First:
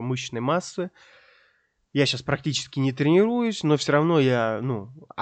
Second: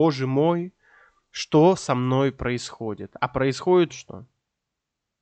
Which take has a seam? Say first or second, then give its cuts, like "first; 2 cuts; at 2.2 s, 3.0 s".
second; 1 cut; at 3.9 s